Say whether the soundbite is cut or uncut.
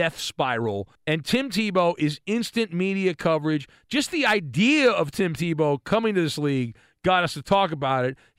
cut